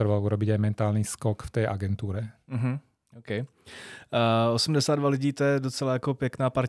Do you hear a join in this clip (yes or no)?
no